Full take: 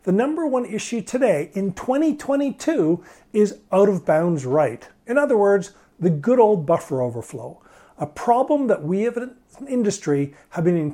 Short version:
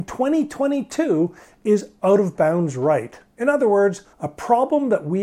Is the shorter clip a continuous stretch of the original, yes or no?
no